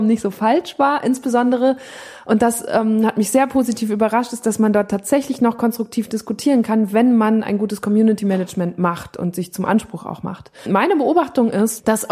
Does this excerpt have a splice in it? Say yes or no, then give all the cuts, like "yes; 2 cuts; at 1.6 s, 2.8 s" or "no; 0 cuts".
no; 0 cuts